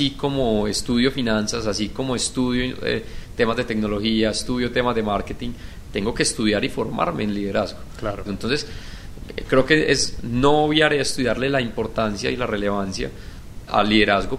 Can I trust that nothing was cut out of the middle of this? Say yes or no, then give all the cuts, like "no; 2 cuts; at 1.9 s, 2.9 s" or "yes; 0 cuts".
no; 1 cut; at 8.3 s